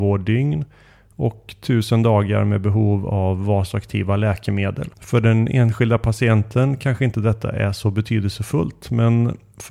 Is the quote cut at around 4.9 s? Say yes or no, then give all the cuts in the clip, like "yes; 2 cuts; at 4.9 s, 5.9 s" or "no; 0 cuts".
yes; 1 cut; at 4.9 s